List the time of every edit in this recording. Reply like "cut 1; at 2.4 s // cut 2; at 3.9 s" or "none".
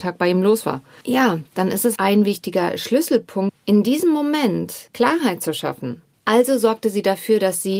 cut 1; at 2.0 s // cut 2; at 6.1 s